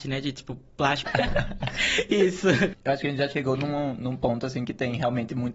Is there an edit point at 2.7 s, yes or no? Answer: yes